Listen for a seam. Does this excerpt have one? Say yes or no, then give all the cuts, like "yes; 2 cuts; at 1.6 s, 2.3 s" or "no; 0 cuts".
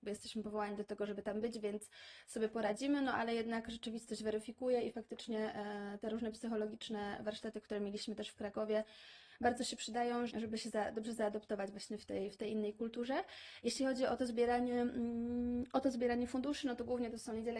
yes; 1 cut; at 10.3 s